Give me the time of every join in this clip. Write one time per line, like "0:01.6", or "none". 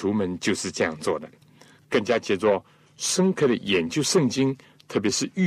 0:01.8